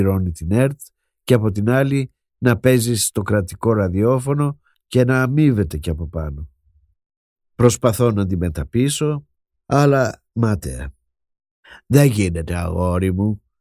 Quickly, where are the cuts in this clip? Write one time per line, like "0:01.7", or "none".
none

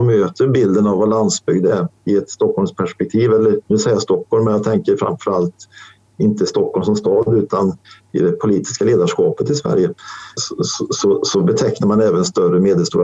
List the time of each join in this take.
0:10.4

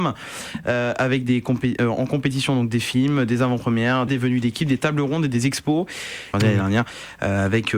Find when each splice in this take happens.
0:04.1
0:06.3

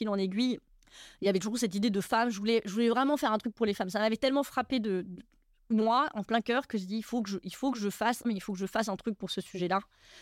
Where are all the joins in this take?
0:08.2

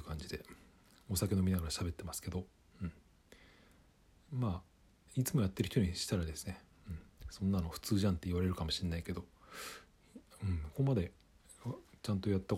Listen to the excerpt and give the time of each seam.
0:10.7

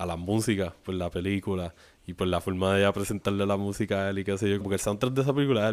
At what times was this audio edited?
0:04.6

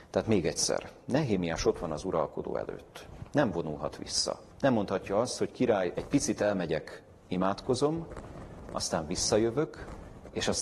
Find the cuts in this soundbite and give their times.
0:04.5
0:06.0

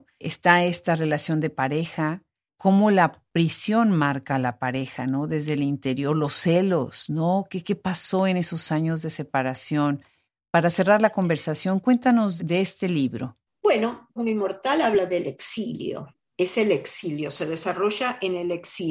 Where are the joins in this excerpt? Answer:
0:12.4
0:14.2

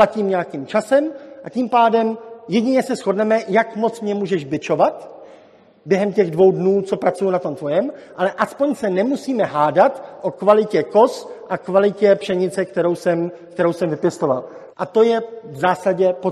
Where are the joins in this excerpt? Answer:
0:14.7

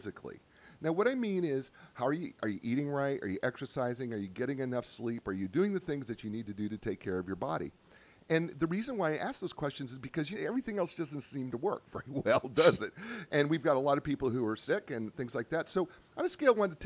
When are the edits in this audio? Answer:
0:10.3

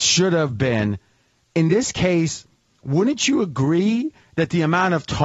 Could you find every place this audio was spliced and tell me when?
0:01.5

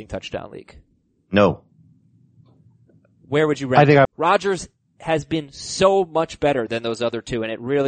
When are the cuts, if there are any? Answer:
0:04.0

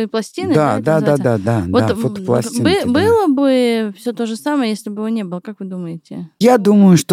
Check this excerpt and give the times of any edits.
none

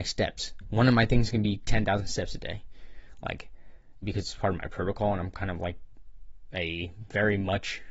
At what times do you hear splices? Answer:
0:04.0

